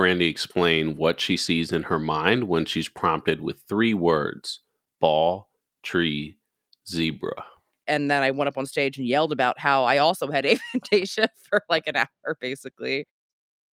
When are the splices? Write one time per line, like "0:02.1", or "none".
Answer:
0:07.8